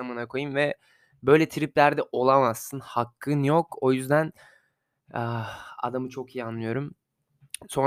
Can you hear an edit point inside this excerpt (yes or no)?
no